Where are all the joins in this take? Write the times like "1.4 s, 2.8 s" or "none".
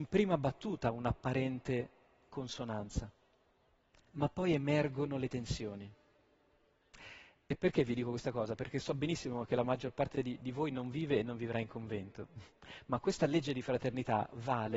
none